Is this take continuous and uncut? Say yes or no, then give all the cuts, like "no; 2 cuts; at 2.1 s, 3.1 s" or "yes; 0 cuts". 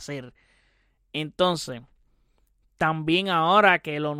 yes; 0 cuts